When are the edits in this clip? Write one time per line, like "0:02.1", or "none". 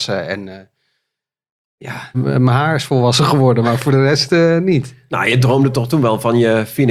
0:02.1

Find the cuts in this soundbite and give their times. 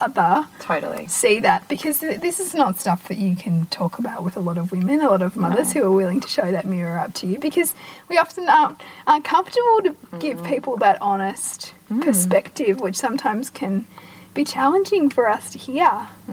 none

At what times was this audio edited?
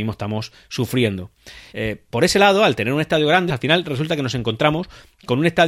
0:01.7
0:03.5

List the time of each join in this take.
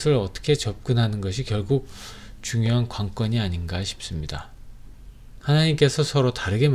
0:05.4

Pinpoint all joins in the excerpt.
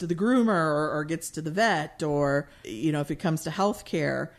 0:02.6

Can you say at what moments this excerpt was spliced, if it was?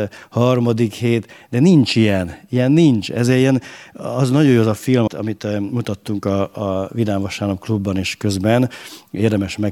0:05.1

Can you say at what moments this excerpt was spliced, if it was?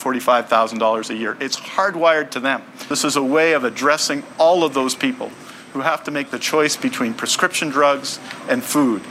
none

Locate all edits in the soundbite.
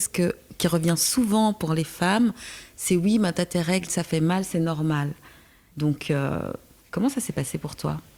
0:05.7

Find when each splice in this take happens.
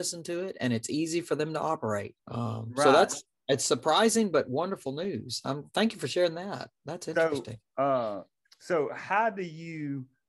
0:02.2

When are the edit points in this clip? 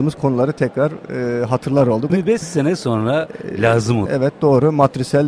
0:02.1
0:04.1

